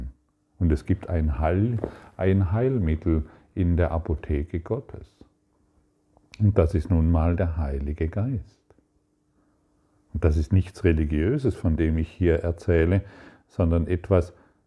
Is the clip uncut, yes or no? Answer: yes